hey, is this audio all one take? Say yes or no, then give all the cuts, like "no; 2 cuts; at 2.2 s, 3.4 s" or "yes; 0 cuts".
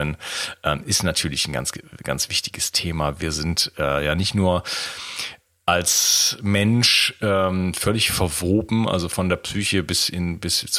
yes; 0 cuts